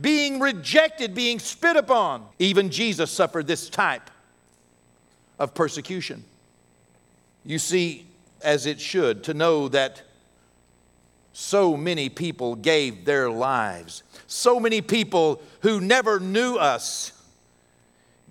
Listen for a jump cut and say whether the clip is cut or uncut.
cut